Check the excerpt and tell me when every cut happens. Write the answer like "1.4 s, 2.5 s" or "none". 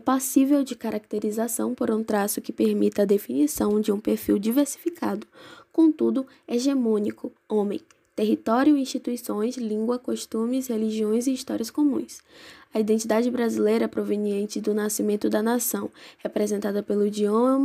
7.4 s